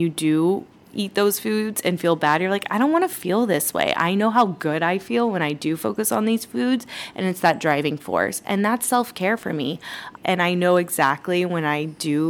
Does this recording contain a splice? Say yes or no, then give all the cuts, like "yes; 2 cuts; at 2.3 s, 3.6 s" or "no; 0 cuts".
yes; 1 cut; at 10.2 s